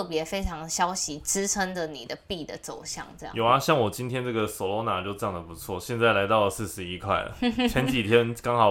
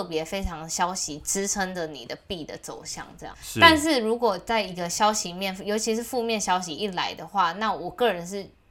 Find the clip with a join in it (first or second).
second